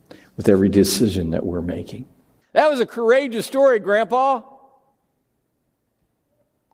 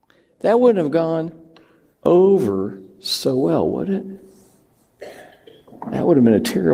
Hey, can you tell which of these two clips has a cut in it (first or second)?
first